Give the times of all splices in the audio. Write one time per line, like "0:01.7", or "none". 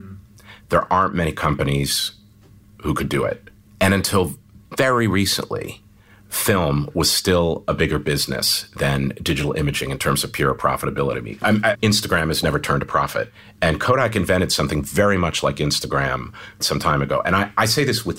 0:11.7
0:16.6

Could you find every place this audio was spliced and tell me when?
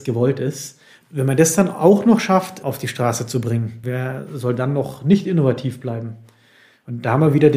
0:01.0
0:02.6
0:03.8

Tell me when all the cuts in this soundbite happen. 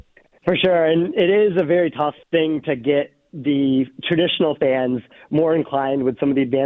0:02.2

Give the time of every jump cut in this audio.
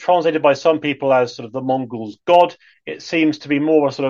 none

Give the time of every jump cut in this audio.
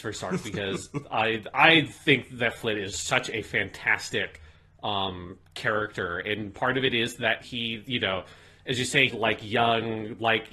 0:02.9
0:07.4
0:09.1

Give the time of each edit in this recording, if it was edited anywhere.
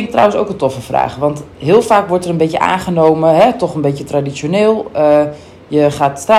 none

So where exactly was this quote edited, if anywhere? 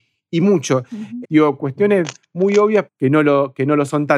0:01.2
0:02.9

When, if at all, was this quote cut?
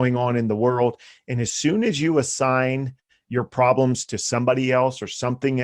none

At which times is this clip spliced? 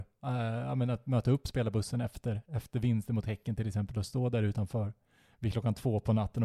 none

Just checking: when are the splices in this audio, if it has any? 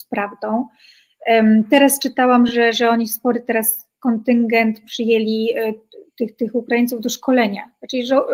none

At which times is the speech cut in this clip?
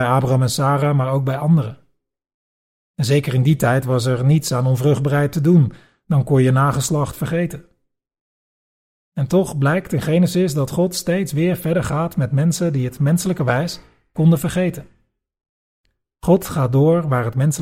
none

